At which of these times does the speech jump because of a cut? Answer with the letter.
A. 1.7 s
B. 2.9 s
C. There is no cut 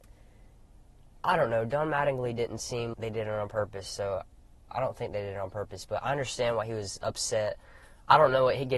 B